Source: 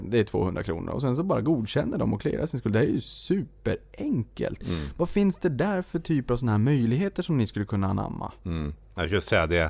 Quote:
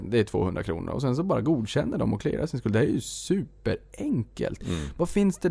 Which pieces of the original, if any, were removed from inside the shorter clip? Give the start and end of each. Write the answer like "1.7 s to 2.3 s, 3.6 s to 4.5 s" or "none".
none